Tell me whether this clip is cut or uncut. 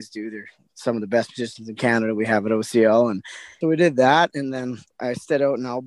cut